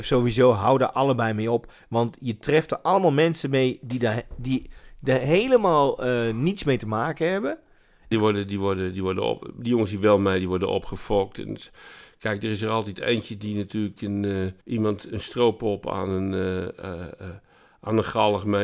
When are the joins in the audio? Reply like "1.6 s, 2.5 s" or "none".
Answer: 8.1 s, 14.6 s